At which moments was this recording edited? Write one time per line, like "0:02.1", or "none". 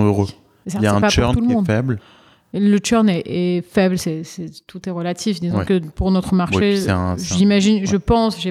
none